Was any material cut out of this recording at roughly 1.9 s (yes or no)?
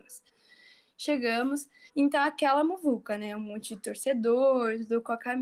yes